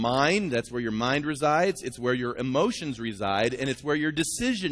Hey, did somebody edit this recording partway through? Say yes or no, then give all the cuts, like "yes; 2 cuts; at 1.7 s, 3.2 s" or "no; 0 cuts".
no; 0 cuts